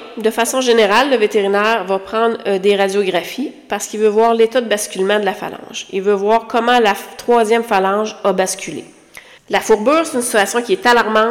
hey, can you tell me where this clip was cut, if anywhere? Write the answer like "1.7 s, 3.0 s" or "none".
9.4 s